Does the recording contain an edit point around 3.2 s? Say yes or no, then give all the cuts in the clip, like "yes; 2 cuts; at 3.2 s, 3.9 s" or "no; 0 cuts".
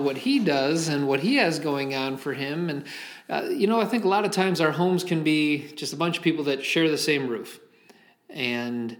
no; 0 cuts